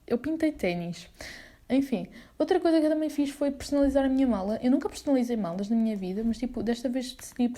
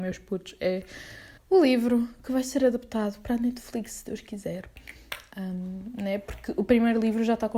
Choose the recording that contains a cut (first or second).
second